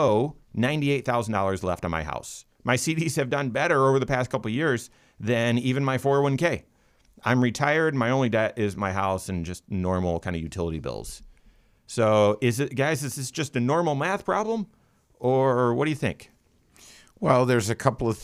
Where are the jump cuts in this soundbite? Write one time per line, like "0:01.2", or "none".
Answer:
0:02.5